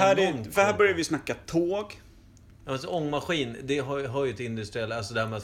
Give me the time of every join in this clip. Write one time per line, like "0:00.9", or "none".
none